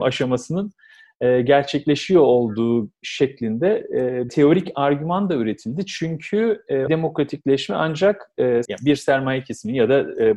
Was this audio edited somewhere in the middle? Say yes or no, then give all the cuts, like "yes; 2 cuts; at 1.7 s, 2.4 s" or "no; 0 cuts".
yes; 3 cuts; at 4.3 s, 6.9 s, 8.7 s